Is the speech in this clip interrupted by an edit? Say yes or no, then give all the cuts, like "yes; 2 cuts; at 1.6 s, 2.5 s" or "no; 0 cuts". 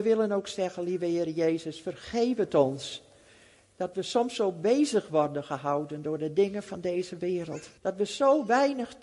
yes; 1 cut; at 7.8 s